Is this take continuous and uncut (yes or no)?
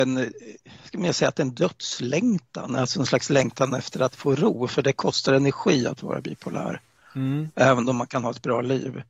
yes